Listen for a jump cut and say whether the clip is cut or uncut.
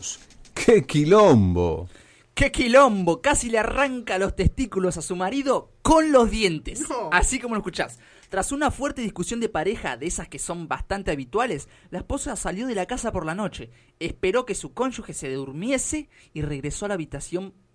uncut